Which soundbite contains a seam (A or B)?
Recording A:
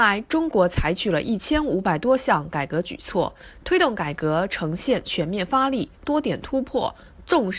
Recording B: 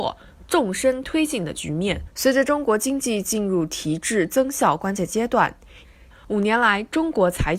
B